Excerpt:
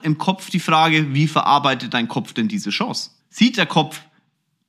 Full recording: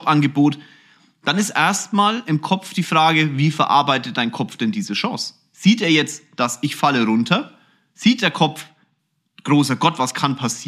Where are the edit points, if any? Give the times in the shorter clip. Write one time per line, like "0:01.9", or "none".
0:03.2